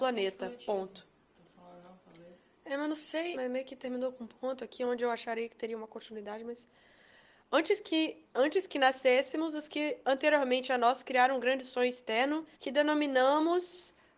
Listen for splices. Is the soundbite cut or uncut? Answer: cut